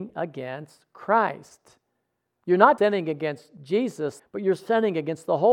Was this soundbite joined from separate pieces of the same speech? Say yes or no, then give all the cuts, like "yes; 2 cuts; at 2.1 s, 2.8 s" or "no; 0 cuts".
yes; 2 cuts; at 2.8 s, 4.2 s